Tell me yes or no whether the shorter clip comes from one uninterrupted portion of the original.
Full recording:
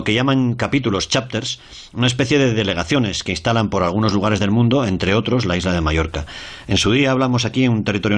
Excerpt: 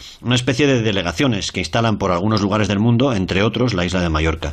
yes